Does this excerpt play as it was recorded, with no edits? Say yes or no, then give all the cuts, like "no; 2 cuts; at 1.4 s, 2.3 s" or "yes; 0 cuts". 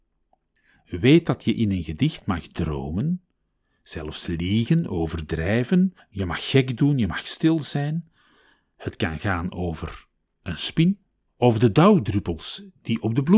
no; 2 cuts; at 6.1 s, 11.3 s